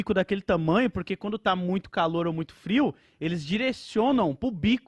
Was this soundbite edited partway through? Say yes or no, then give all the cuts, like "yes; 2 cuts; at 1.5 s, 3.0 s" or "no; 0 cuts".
no; 0 cuts